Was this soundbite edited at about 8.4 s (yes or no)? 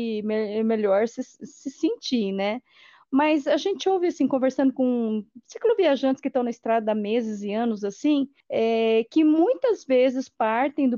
yes